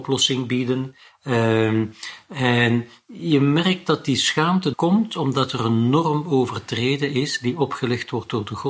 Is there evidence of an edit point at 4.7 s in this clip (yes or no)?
yes